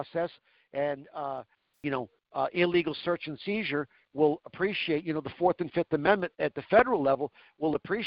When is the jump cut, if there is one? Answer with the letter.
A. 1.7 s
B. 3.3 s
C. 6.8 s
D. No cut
A